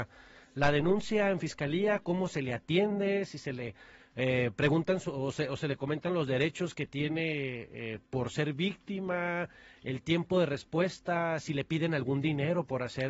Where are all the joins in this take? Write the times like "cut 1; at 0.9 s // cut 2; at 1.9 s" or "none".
none